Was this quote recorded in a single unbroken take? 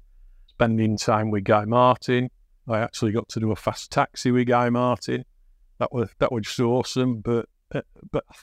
yes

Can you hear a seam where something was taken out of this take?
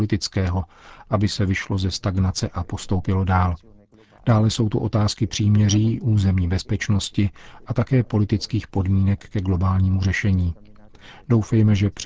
no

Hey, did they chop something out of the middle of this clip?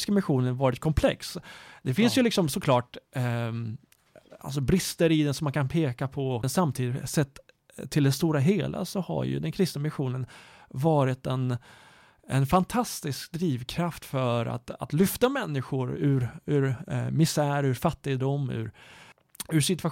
no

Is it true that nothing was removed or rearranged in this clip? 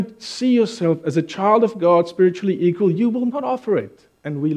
yes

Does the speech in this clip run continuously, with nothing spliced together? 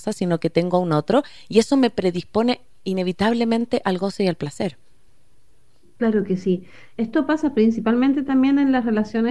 yes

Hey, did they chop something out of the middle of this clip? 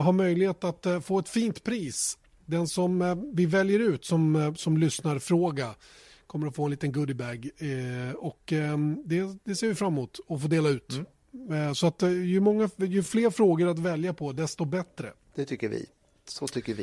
no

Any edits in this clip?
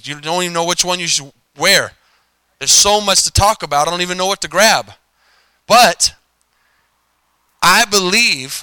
no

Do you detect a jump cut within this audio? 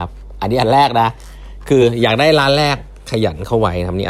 no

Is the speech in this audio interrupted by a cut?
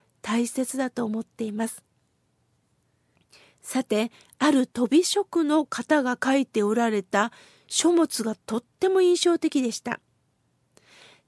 no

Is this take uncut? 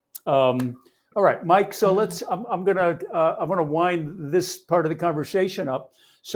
yes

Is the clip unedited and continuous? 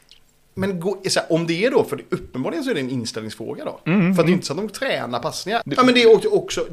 no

